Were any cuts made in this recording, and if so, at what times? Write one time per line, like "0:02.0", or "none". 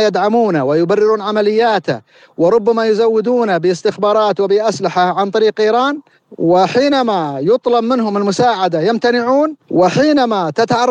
0:09.6